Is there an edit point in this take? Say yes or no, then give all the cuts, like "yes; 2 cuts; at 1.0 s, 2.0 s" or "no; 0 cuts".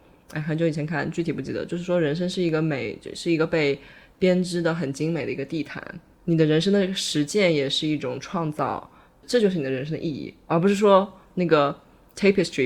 yes; 1 cut; at 6.1 s